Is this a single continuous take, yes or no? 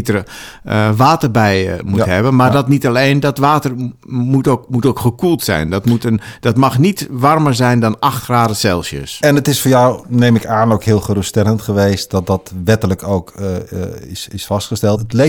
yes